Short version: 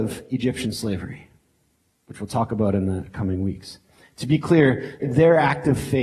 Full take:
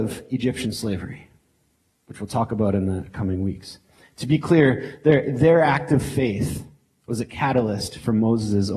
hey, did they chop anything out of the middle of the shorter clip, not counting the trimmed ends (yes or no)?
yes